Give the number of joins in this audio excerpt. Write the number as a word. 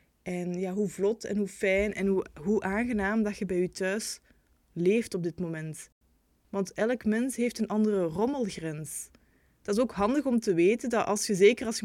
zero